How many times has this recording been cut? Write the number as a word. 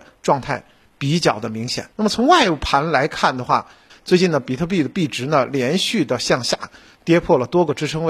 two